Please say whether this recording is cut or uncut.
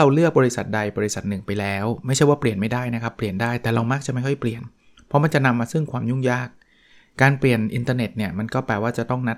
uncut